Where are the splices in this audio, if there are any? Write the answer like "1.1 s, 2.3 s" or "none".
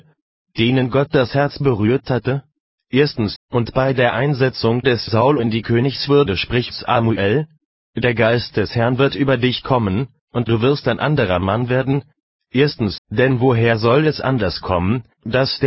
3.4 s, 13.0 s